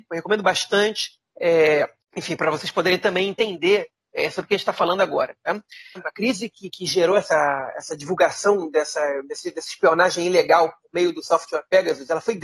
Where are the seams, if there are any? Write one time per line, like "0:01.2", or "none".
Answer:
0:06.0